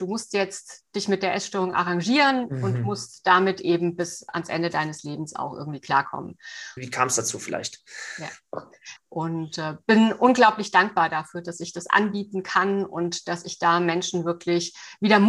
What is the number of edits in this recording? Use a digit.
2